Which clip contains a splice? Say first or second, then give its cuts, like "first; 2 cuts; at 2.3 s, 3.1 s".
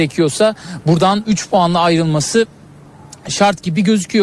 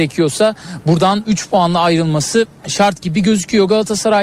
second; 1 cut; at 2.6 s